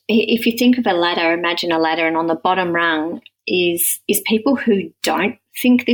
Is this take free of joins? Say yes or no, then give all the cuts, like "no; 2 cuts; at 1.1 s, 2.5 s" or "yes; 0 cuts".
yes; 0 cuts